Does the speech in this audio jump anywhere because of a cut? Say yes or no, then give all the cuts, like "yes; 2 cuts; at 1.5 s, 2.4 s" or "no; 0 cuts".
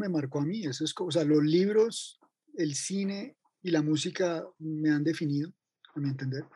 no; 0 cuts